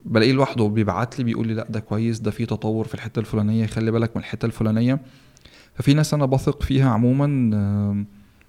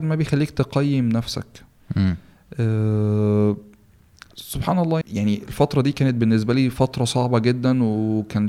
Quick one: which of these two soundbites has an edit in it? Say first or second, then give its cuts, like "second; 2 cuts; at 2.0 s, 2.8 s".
second; 1 cut; at 5.0 s